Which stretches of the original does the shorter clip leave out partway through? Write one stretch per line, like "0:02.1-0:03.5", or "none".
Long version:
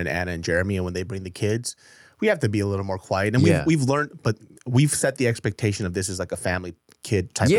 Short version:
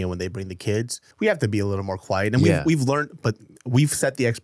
0:01.9-0:02.1